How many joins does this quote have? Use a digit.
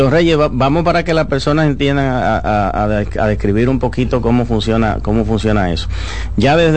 0